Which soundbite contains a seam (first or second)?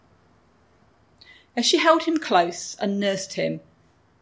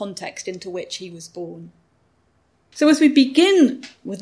second